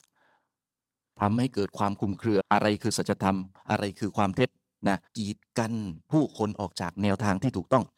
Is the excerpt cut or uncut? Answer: cut